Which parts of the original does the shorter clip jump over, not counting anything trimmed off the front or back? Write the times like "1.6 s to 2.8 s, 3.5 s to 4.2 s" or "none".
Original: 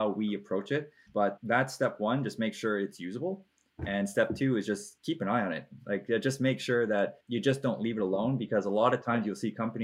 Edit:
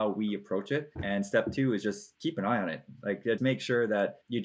0.9 s to 3.8 s, 6.2 s to 6.4 s

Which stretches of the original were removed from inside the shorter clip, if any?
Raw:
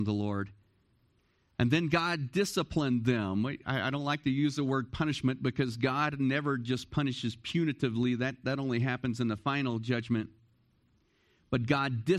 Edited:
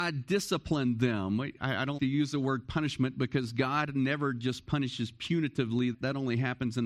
4.0 s to 4.2 s, 8.2 s to 8.4 s

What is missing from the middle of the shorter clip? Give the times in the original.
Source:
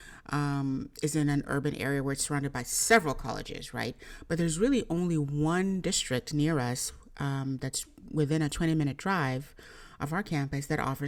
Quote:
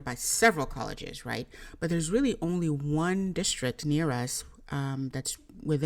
none

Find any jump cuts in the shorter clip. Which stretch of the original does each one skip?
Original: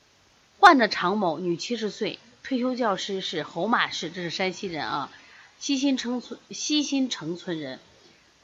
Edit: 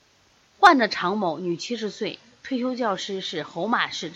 none

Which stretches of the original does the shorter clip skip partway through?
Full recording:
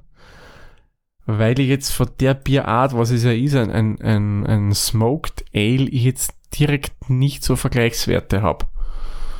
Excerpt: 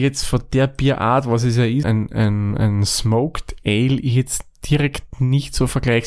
3.5 s to 3.7 s

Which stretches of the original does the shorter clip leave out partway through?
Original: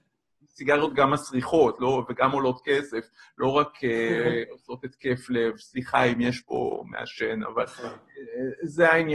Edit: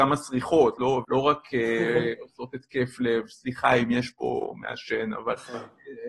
2.1 s to 3.3 s

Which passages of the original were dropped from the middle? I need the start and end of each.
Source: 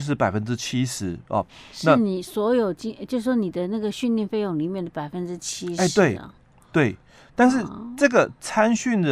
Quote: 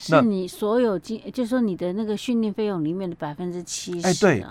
none

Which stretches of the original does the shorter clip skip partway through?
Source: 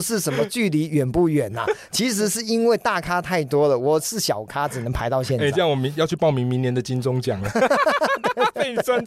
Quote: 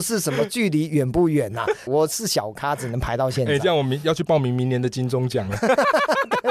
1.9 s to 3.8 s

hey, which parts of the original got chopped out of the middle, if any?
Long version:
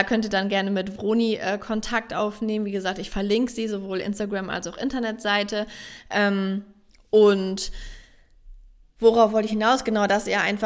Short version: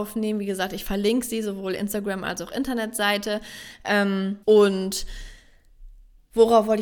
6.7 s to 7.1 s

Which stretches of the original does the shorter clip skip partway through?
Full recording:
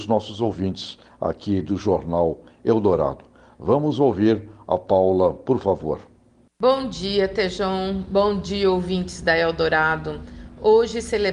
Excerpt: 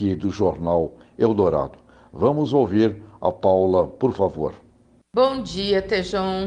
none

